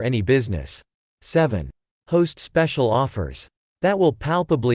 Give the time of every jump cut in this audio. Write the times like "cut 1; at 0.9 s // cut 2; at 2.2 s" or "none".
cut 1; at 3.6 s